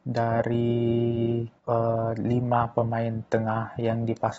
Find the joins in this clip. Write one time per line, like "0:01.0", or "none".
0:01.6